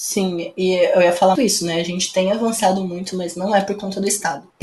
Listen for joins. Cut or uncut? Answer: cut